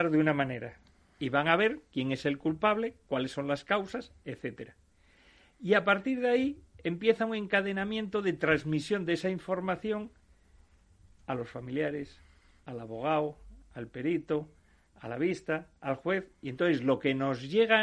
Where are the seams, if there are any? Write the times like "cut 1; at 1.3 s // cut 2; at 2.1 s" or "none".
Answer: none